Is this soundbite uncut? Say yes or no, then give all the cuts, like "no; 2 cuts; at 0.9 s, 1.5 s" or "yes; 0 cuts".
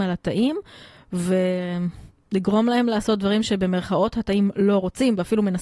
yes; 0 cuts